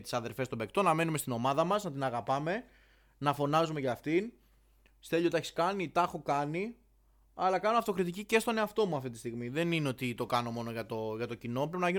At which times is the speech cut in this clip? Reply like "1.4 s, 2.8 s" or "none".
none

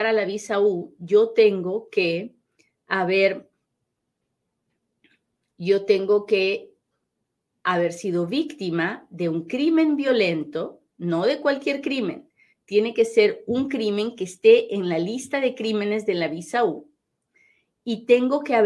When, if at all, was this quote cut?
none

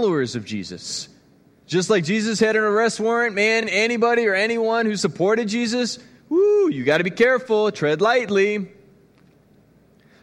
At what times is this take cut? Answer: none

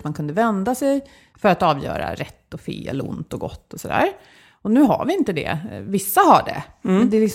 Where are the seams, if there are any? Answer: 1.3 s

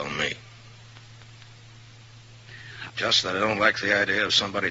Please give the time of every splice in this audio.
2.9 s

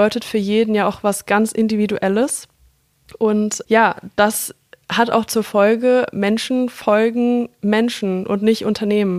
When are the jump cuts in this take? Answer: none

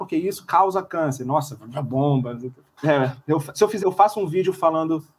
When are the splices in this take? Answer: 2.7 s, 3.8 s

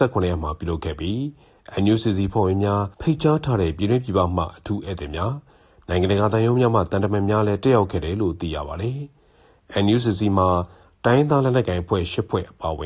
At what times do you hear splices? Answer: 2.9 s

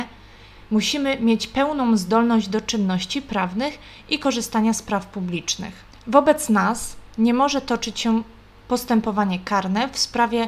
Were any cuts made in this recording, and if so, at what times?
none

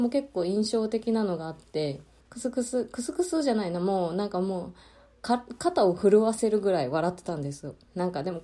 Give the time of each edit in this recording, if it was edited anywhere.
2.2 s

